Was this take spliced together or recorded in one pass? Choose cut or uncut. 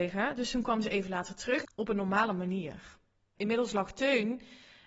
cut